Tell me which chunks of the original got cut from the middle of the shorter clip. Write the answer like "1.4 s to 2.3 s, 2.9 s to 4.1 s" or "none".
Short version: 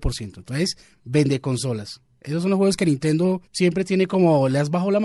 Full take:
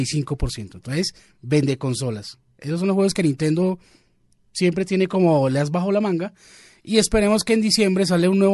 3.8 s to 4.4 s

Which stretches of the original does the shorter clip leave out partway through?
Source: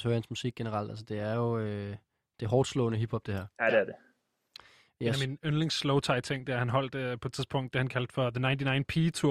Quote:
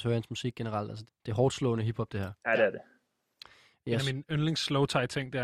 1.1 s to 2.2 s

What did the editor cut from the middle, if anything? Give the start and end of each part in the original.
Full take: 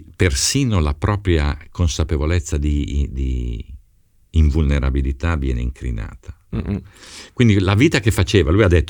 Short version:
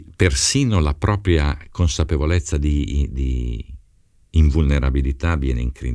none

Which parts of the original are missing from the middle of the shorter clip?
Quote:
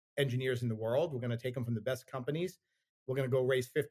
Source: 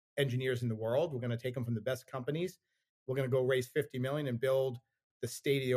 none

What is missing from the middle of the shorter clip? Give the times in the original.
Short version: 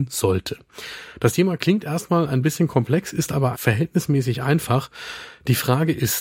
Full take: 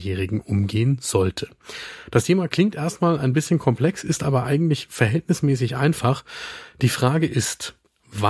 4.4 s to 4.9 s

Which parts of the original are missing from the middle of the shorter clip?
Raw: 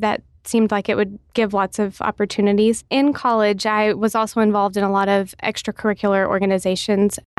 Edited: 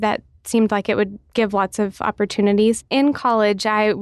none

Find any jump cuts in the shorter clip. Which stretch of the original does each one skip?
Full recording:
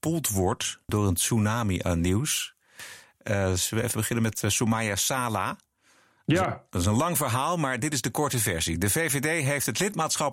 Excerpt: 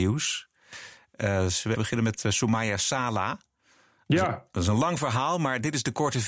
3.8 s to 3.9 s

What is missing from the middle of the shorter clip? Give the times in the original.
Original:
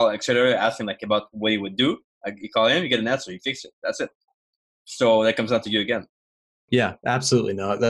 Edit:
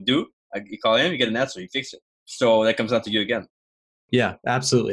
3.7 s to 4.6 s

